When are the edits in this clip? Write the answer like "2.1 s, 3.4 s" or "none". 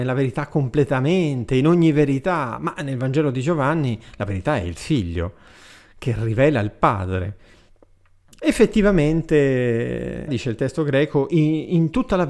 8.4 s, 10.3 s